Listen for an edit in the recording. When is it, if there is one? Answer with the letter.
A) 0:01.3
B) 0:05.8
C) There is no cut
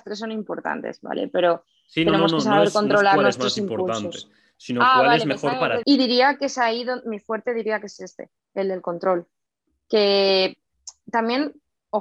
B